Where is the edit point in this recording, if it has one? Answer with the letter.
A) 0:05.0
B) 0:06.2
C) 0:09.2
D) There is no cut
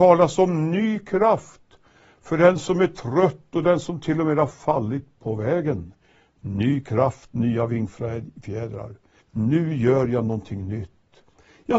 C